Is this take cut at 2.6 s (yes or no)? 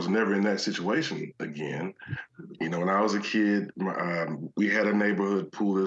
yes